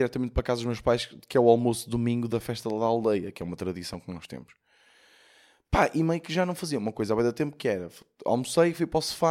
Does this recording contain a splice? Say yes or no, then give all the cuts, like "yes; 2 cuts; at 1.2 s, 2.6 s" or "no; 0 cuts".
no; 0 cuts